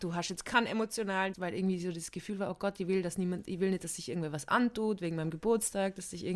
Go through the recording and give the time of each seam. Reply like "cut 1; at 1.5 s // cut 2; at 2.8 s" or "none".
cut 1; at 1.3 s

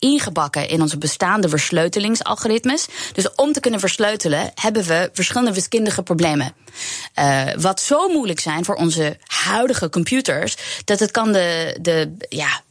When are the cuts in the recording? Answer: none

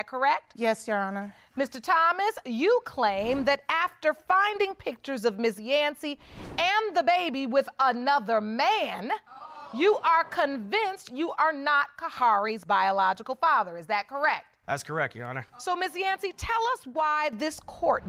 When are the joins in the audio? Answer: none

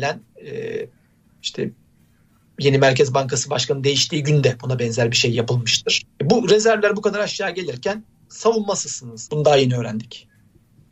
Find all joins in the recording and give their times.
cut 1; at 6.0 s // cut 2; at 9.3 s

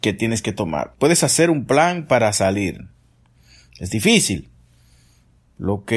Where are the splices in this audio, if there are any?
cut 1; at 0.9 s

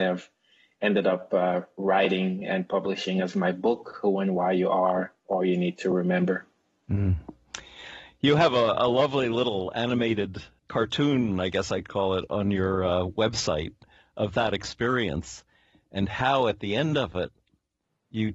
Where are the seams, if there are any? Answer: cut 1; at 10.6 s

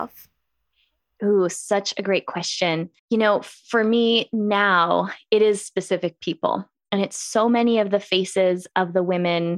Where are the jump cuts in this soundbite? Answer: cut 1; at 3.0 s

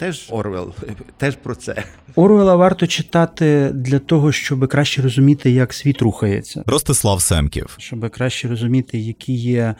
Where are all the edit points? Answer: none

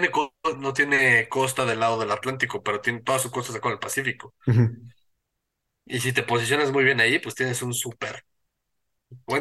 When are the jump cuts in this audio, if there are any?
none

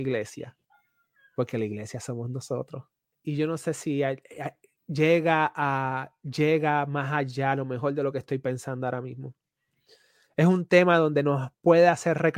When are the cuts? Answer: cut 1; at 3.1 s

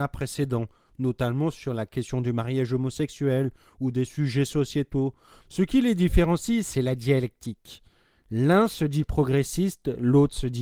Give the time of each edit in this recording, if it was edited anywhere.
cut 1; at 5.4 s

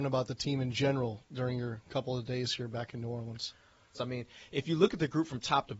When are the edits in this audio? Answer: cut 1; at 3.9 s

